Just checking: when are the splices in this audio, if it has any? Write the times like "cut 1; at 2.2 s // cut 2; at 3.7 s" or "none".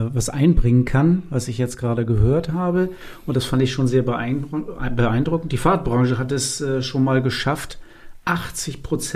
none